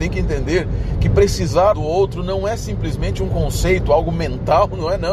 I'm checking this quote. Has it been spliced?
yes; 1 cut; at 1.7 s

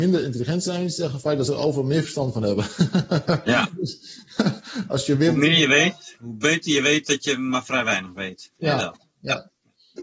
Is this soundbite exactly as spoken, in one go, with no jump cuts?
yes; 0 cuts

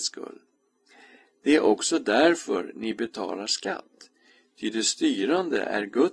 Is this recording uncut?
yes; 0 cuts

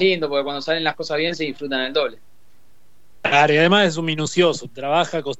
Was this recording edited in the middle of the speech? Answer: no; 0 cuts

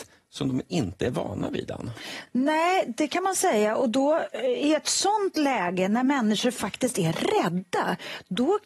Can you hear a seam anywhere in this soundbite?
no; 0 cuts

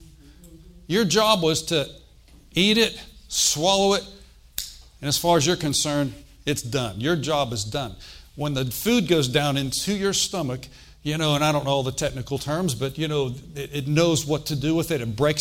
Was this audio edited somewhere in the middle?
no; 0 cuts

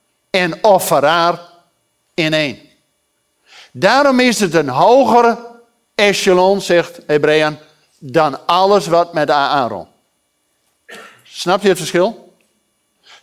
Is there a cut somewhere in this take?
no; 0 cuts

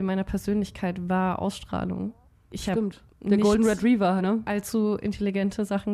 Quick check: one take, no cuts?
no; 2 cuts; at 2.5 s, 4.2 s

